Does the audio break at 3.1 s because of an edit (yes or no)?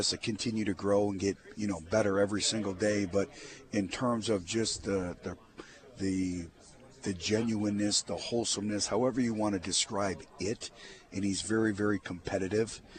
no